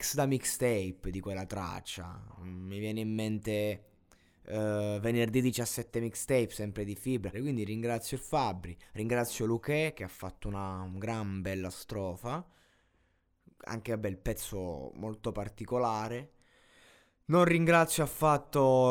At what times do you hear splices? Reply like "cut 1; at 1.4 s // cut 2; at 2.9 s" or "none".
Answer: cut 1; at 7.3 s